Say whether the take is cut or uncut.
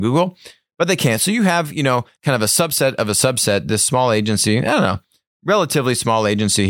uncut